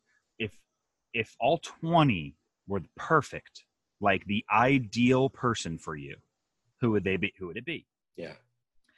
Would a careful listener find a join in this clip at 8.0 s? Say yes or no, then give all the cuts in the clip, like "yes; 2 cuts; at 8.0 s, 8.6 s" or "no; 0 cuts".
yes; 2 cuts; at 6.7 s, 8.0 s